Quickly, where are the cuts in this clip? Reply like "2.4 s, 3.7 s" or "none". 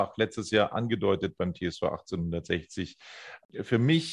none